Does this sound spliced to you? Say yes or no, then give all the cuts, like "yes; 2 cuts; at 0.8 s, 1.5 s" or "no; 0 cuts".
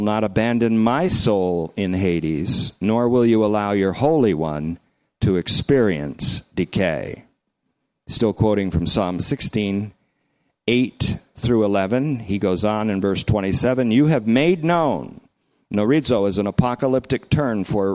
no; 0 cuts